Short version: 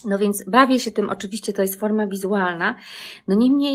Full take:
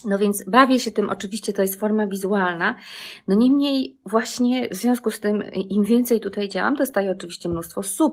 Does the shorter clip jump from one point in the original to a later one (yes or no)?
no